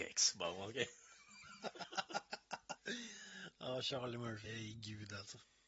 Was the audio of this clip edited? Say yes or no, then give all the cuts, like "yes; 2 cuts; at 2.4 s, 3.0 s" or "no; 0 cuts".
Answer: yes; 2 cuts; at 2.8 s, 4.5 s